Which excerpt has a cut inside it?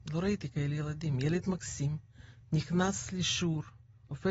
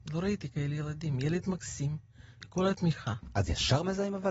second; 1 cut; at 2.4 s

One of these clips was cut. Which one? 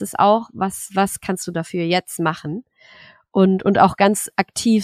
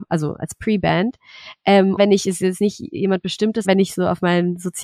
second; 2 cuts; at 2.0 s, 3.6 s

